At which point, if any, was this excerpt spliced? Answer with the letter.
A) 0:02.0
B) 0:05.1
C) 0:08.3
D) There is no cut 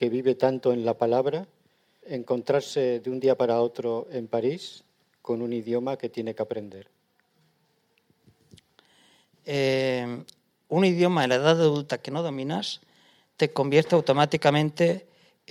A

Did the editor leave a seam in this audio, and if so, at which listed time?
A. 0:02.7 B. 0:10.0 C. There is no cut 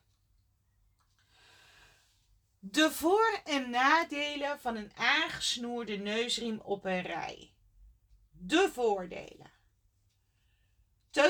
C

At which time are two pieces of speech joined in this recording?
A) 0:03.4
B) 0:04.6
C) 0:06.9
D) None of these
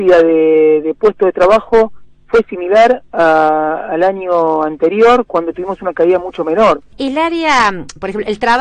C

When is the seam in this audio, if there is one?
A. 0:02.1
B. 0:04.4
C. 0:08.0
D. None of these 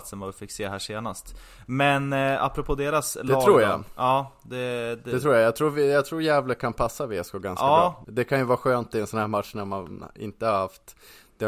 C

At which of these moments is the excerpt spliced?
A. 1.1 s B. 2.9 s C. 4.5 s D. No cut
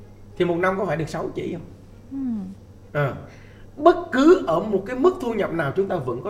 B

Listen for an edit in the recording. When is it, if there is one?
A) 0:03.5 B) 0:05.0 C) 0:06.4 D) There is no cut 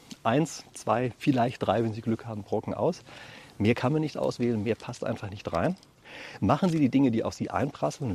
D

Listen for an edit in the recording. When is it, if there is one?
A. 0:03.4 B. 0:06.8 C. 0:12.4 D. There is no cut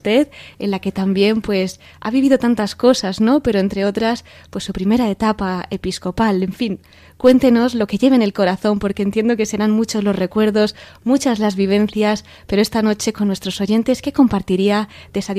D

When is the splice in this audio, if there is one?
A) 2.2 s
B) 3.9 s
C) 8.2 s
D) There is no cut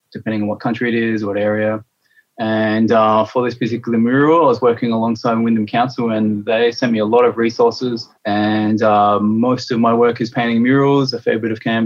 C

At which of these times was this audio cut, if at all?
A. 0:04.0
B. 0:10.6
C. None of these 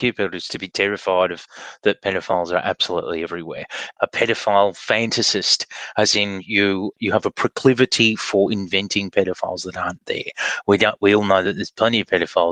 A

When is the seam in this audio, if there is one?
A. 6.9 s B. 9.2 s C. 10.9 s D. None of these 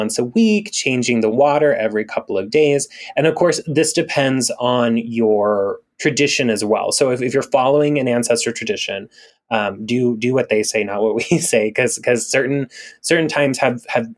D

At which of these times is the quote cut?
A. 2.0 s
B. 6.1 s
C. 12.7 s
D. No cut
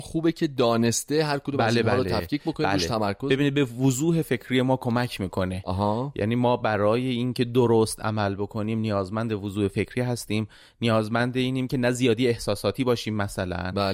D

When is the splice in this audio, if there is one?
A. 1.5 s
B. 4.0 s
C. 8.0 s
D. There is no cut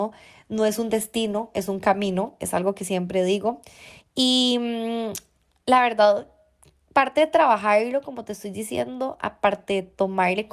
B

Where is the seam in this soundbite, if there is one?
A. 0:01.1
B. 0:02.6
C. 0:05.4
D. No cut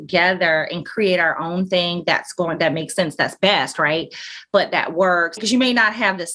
C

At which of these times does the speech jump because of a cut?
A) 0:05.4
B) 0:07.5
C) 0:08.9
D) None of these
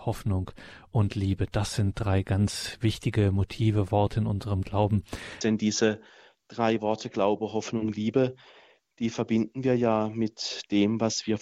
A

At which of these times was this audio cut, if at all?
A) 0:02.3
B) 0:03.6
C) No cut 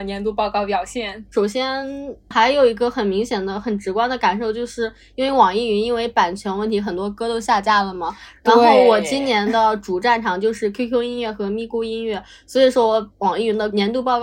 A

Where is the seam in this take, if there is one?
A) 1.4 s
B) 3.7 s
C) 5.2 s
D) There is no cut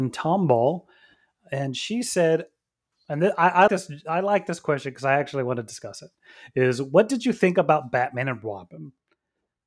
B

